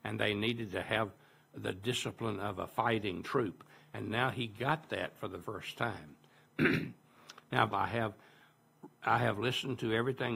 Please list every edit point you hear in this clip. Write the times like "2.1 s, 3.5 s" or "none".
5.4 s, 7.7 s